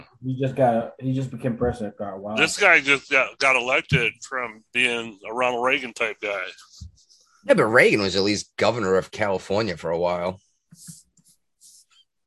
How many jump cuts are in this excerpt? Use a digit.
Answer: 0